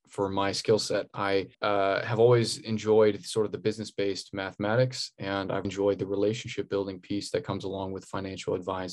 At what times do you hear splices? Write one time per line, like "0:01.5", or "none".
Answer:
0:01.5
0:05.6